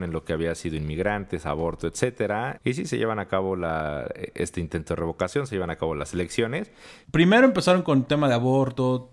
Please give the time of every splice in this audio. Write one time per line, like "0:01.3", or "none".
0:02.6
0:07.0